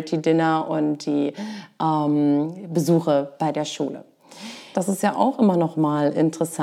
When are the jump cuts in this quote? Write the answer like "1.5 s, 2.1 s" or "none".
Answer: 4.7 s

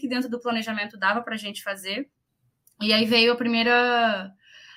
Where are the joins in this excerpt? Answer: none

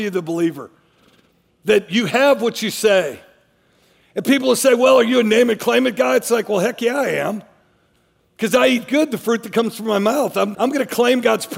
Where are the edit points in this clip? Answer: 10.5 s

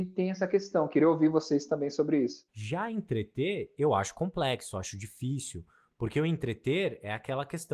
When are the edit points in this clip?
2.5 s

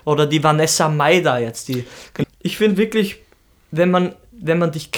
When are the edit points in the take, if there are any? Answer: 2.2 s

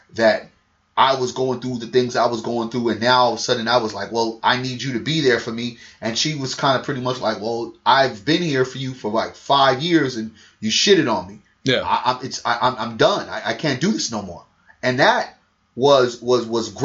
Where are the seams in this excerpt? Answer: none

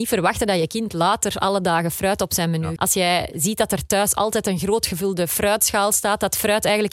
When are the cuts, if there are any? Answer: 2.8 s

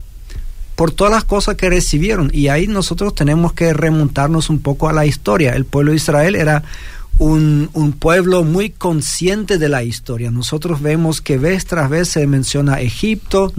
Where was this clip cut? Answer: none

